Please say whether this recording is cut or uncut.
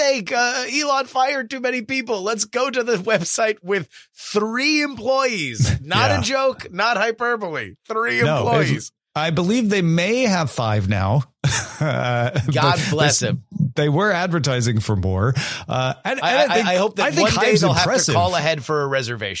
uncut